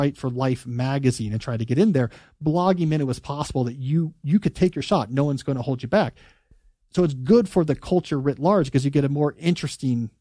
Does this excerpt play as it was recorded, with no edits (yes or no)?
yes